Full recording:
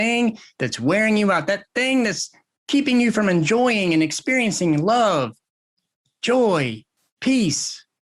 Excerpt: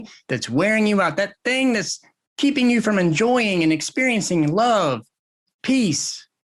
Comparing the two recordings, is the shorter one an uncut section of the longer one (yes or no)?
no